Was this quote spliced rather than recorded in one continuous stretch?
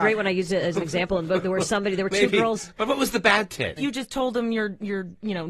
yes; 1 cut; at 3.8 s

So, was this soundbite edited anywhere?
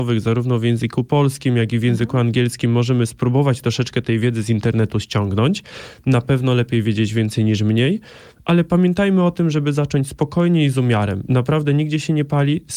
no; 0 cuts

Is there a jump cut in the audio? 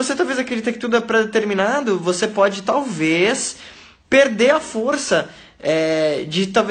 no; 0 cuts

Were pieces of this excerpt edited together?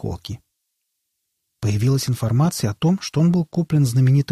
yes; 1 cut; at 1.6 s

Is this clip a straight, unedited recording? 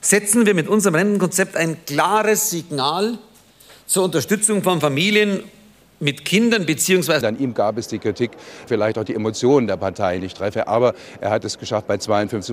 no; 2 cuts; at 7.2 s, 8.7 s

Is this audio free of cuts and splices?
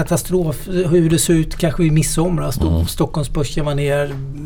yes; 0 cuts

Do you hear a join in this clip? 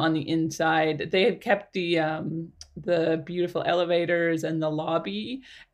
no; 0 cuts

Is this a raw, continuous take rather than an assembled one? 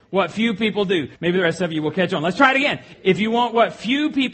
no; 2 cuts; at 1.2 s, 2.9 s

